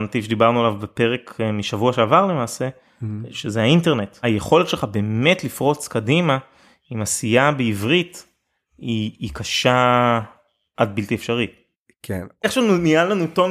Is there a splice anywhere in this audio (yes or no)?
no